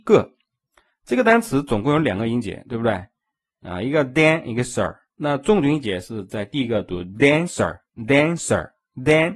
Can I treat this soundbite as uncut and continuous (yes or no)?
no